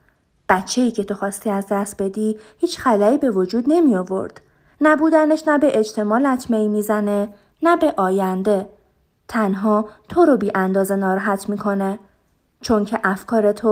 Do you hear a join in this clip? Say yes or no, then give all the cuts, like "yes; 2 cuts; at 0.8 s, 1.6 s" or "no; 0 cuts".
no; 0 cuts